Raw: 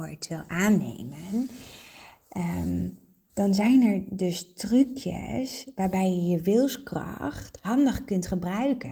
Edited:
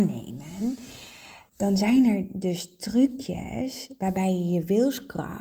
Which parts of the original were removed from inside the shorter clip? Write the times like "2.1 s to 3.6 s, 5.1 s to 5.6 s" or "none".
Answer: 2.2 s to 3.3 s